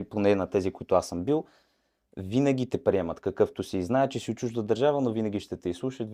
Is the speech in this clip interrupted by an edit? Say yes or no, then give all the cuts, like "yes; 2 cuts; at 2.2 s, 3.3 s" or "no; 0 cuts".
no; 0 cuts